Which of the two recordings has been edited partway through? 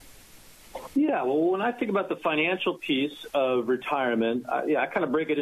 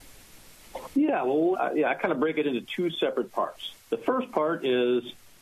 second; 1 cut; at 1.5 s

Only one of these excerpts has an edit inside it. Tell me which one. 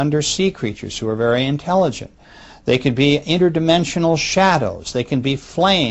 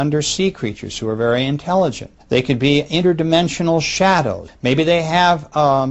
second; 2 cuts; at 2.2 s, 4.5 s

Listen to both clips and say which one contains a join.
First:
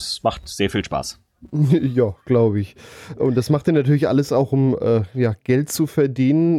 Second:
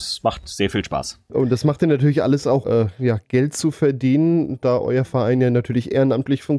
second; 2 cuts; at 1.3 s, 2.6 s

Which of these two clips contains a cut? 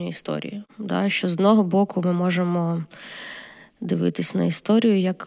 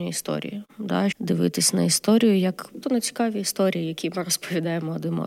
second; 2 cuts; at 1.1 s, 2.8 s

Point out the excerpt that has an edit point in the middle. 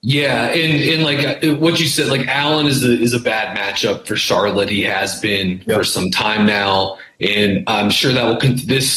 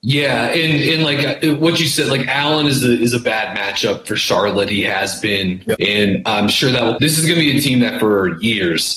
second; 2 cuts; at 5.7 s, 7.0 s

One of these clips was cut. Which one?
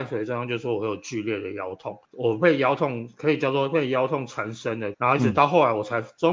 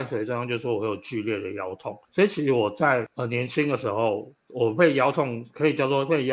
first; 2 cuts; at 2.0 s, 4.9 s

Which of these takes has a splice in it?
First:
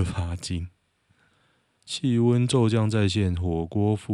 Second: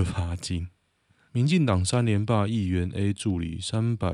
second; 1 cut; at 1.3 s

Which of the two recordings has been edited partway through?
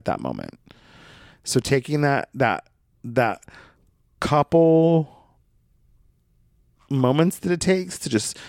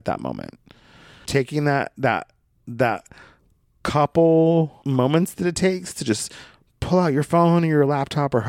second; 2 cuts; at 1.2 s, 4.8 s

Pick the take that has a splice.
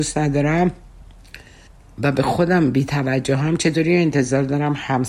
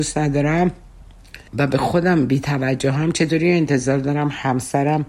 second; 1 cut; at 1.5 s

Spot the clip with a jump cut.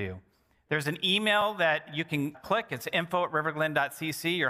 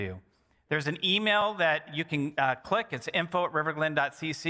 first; 1 cut; at 2.3 s

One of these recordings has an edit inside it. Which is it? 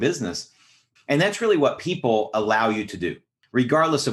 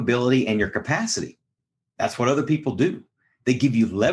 first; 1 cut; at 1.0 s

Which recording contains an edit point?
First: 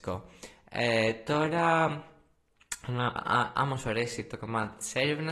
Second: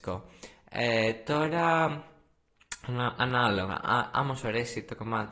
first; 1 cut; at 3.2 s

